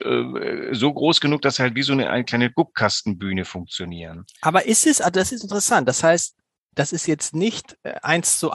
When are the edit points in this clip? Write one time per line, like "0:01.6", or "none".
none